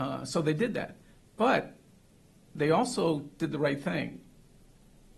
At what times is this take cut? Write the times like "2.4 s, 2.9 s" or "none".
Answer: none